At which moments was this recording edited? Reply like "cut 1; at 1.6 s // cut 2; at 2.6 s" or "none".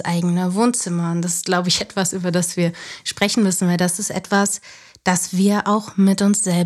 none